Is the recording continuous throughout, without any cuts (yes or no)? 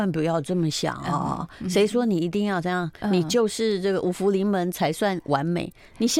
no